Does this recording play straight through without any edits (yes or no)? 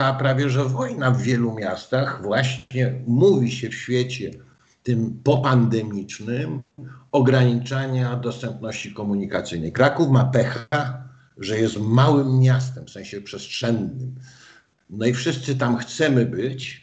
yes